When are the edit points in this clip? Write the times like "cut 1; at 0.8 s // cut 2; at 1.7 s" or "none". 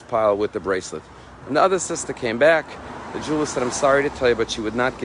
cut 1; at 1.4 s

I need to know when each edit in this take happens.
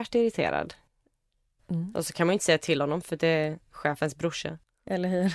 none

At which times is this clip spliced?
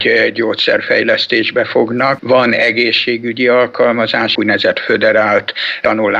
cut 1; at 2.2 s // cut 2; at 4.4 s

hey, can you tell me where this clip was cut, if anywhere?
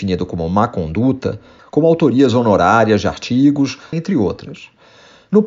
cut 1; at 1.6 s // cut 2; at 3.9 s

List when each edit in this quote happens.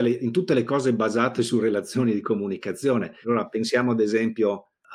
cut 1; at 3.2 s

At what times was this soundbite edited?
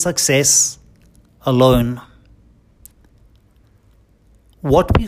none

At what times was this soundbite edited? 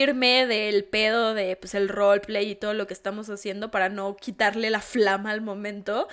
none

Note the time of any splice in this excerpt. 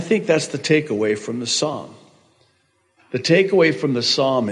none

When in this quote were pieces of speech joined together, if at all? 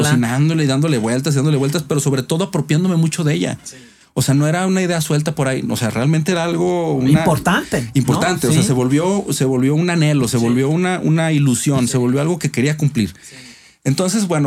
none

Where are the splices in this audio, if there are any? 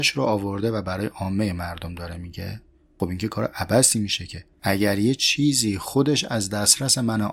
cut 1; at 4.6 s

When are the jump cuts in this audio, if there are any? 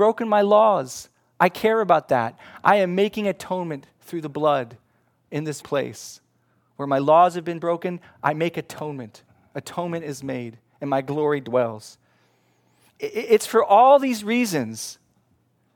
cut 1; at 5.6 s

